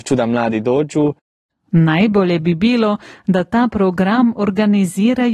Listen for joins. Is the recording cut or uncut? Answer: uncut